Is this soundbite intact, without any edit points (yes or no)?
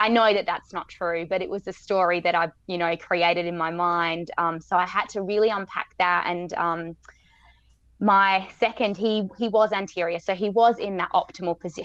yes